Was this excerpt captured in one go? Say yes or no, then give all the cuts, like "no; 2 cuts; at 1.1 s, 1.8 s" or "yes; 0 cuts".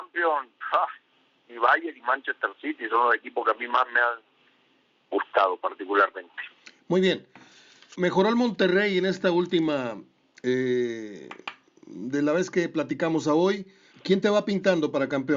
no; 2 cuts; at 7.9 s, 13.9 s